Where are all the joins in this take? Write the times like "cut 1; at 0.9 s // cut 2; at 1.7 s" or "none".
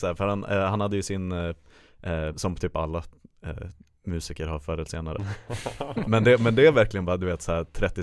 cut 1; at 2.3 s